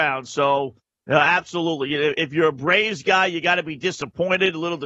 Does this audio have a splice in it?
no; 0 cuts

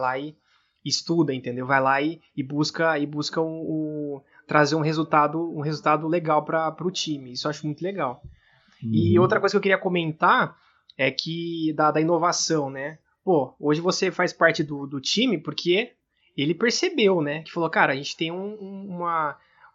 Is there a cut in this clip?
no; 0 cuts

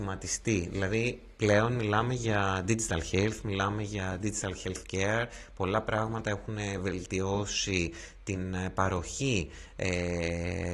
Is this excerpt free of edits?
yes; 0 cuts

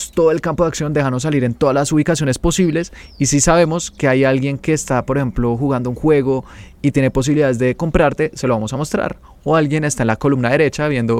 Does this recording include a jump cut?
no; 0 cuts

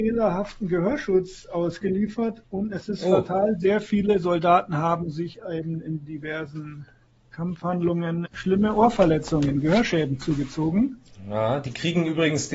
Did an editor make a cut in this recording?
yes; 1 cut; at 8.3 s

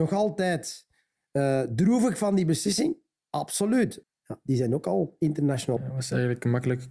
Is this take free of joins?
no; 2 cuts; at 4.0 s, 5.8 s

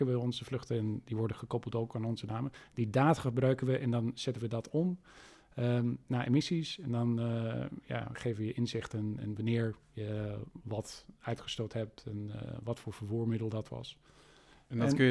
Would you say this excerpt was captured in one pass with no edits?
yes; 0 cuts

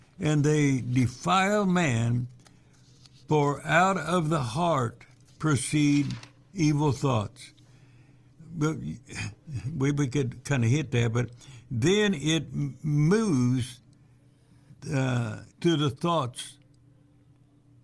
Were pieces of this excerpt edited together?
yes; 1 cut; at 15.5 s

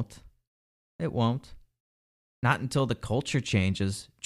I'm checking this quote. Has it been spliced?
no; 0 cuts

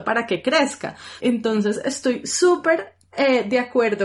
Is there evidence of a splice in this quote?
yes; 1 cut; at 1.2 s

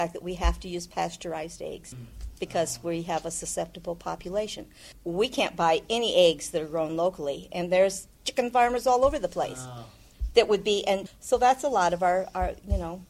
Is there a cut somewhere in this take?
yes; 2 cuts; at 8.1 s, 11.1 s

